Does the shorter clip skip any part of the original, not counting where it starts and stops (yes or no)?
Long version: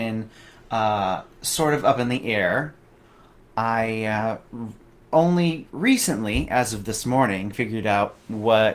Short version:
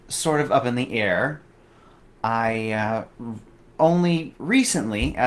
no